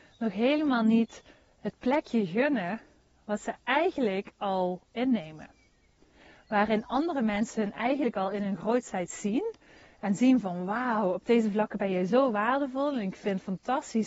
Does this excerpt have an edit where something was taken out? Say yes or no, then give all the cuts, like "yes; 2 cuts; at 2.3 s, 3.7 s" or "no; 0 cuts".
no; 0 cuts